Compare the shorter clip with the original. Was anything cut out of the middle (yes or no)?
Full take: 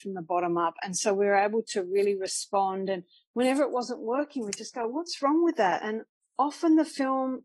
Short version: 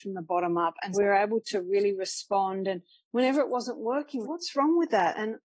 yes